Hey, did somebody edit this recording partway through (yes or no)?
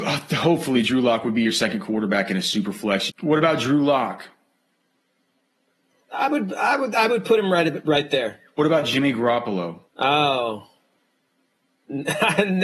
yes